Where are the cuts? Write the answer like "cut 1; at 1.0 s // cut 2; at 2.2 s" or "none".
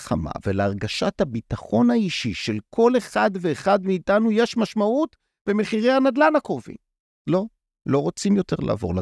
cut 1; at 7.2 s